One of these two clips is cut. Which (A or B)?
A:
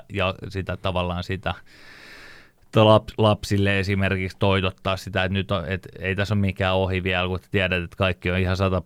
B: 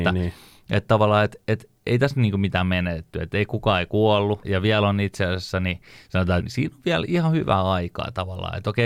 B